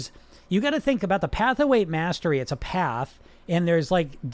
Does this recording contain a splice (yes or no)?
no